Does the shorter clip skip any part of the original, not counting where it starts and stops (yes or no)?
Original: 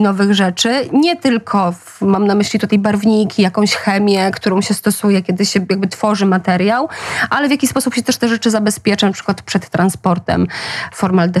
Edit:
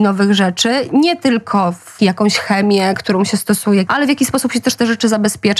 yes